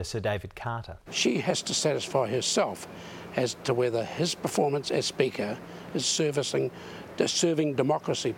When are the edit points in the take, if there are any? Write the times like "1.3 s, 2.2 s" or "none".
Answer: 1.1 s, 6.0 s